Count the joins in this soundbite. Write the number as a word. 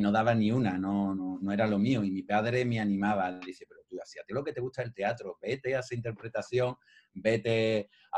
one